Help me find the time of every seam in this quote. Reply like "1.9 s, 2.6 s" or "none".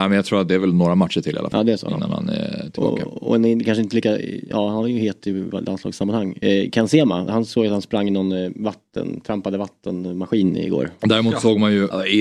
7.3 s, 11.0 s